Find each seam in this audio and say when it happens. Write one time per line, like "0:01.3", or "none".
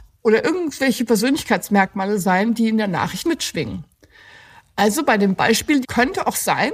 0:03.2
0:05.8